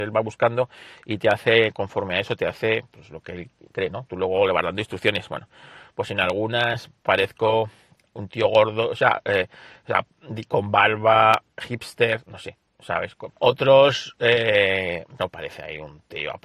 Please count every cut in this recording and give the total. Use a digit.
2